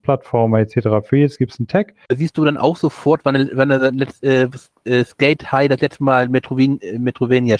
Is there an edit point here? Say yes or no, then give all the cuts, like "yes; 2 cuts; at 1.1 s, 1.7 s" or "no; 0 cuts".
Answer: yes; 1 cut; at 2.1 s